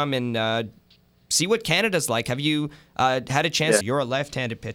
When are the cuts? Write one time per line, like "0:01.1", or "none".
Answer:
0:03.8